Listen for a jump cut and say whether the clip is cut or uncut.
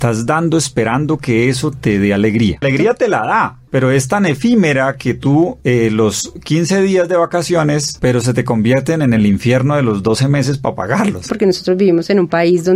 cut